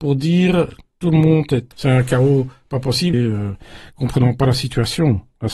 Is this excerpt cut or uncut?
cut